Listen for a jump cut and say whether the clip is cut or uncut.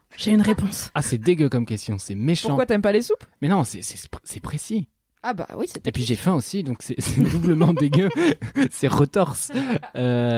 uncut